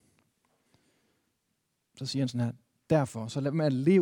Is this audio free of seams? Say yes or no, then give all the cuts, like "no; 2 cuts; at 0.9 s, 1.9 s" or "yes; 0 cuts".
yes; 0 cuts